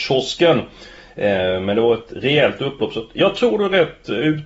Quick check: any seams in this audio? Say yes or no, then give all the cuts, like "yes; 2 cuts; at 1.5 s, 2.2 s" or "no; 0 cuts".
no; 0 cuts